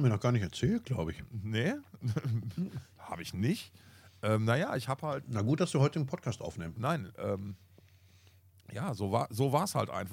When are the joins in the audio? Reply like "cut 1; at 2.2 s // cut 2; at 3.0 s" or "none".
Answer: cut 1; at 6.8 s